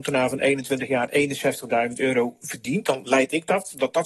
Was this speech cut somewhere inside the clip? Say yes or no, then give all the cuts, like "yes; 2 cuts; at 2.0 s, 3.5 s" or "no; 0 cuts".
no; 0 cuts